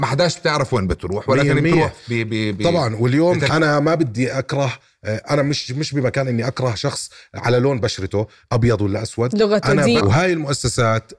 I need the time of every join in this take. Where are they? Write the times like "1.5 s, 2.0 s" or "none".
3.5 s, 10.0 s